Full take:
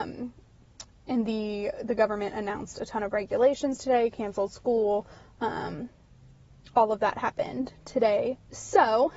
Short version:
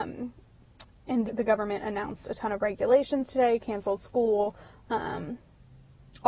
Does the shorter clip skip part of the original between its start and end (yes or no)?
yes